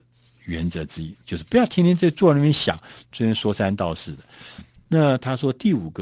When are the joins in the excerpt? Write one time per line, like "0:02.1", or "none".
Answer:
none